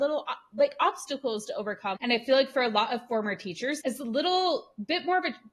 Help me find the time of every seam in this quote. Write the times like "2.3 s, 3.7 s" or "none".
1.9 s, 3.8 s